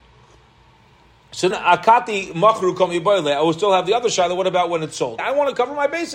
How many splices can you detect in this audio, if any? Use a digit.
2